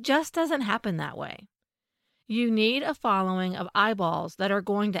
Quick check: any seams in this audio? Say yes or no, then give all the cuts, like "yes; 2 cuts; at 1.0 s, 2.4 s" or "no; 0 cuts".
no; 0 cuts